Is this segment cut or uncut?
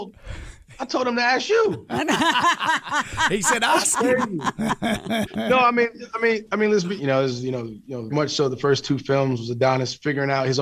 cut